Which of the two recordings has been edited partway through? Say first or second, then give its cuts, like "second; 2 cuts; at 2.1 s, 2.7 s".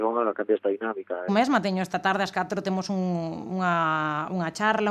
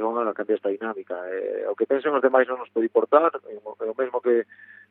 first; 1 cut; at 1.3 s